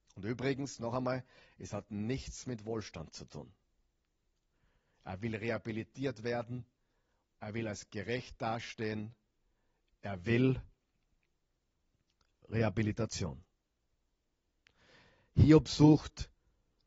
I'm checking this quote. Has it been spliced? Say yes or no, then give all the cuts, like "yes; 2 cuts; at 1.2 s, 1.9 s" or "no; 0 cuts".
no; 0 cuts